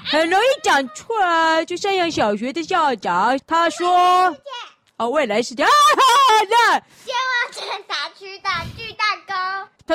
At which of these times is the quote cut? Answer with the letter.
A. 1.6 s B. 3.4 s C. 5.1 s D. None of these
B